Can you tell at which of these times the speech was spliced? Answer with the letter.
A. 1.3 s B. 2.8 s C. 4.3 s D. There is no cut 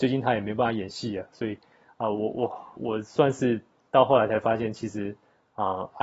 B